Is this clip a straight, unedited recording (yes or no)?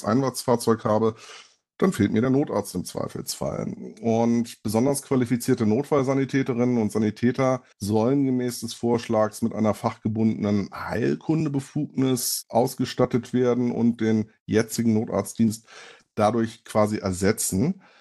no